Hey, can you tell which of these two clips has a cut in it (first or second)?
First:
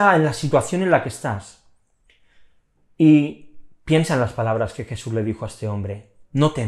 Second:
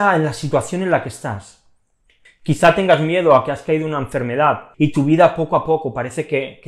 second